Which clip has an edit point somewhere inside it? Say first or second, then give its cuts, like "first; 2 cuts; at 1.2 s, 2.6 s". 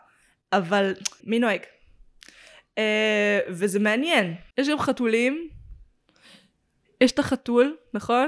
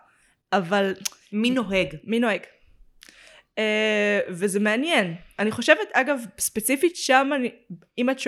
first; 2 cuts; at 1.2 s, 4.5 s